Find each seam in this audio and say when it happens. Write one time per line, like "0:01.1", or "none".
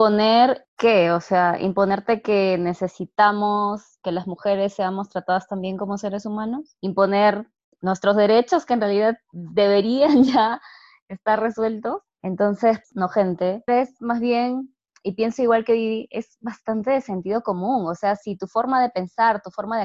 0:12.2
0:13.7